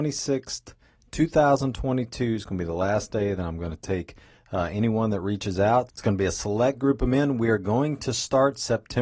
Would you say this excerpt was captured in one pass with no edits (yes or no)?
no